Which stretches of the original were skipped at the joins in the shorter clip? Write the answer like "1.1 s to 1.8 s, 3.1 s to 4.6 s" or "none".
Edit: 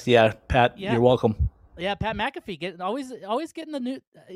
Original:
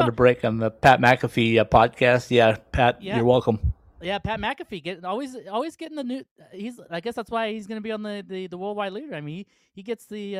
none